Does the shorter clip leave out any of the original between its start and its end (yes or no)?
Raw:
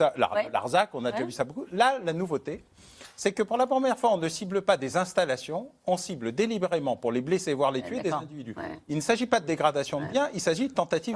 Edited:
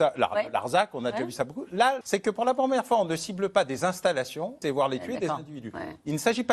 yes